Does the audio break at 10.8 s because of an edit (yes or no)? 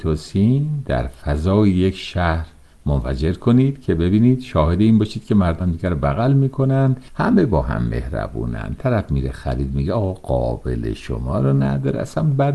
no